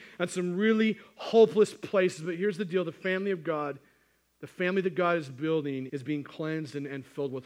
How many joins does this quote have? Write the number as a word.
one